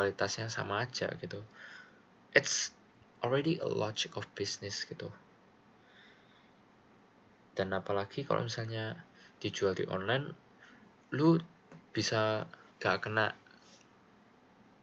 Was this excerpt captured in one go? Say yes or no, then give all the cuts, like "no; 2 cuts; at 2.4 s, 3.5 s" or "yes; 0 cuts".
no; 2 cuts; at 2.2 s, 12.7 s